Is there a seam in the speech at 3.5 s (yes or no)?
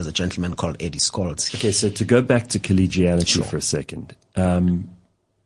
no